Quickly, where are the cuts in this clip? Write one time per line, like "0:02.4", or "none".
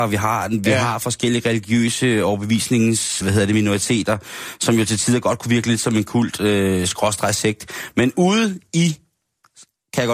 0:03.2